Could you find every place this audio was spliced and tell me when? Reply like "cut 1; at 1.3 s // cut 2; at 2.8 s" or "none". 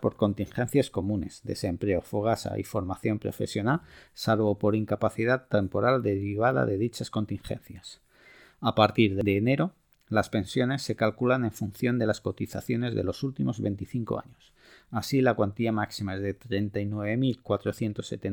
none